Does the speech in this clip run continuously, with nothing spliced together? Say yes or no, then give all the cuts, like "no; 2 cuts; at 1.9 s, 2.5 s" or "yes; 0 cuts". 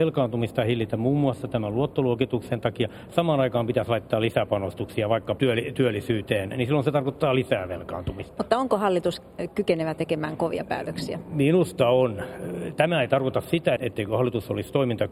no; 2 cuts; at 5.4 s, 13.8 s